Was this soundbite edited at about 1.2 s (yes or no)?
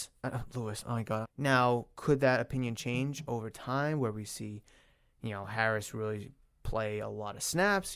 yes